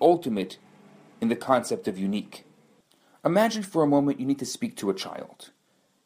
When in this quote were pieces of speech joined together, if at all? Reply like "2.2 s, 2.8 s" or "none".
none